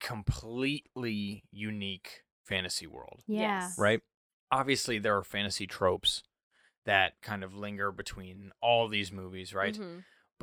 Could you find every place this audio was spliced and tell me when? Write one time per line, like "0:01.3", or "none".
none

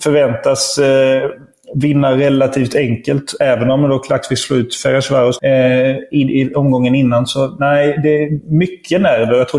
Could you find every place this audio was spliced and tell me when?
0:05.4

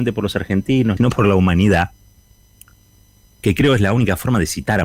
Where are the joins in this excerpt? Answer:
0:01.0

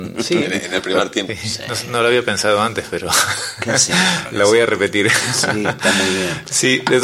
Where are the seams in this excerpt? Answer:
0:01.3

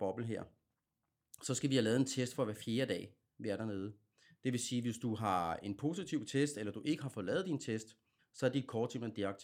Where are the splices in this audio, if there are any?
0:04.3
0:08.2

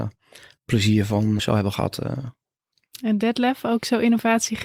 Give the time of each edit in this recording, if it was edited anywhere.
0:01.4

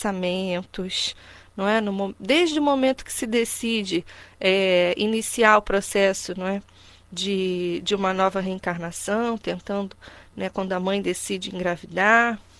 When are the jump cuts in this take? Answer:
none

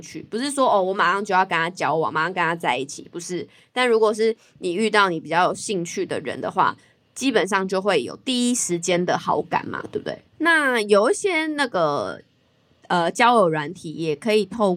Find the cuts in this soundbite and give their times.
0:10.3

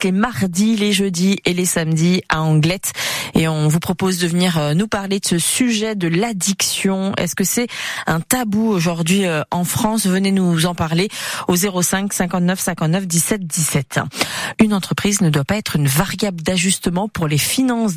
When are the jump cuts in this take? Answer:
0:14.5

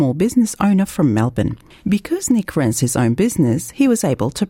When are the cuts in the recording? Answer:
0:01.8

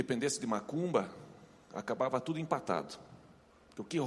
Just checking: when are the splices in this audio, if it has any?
none

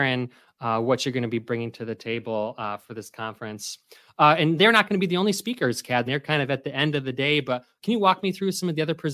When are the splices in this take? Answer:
0:06.1

